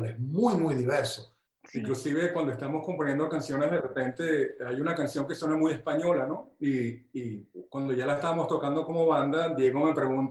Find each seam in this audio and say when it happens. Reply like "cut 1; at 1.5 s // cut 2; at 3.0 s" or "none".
cut 1; at 1.5 s